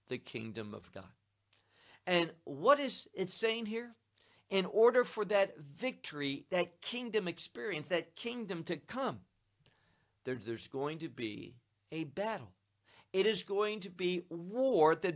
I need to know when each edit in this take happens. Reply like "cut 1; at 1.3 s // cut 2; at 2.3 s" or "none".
none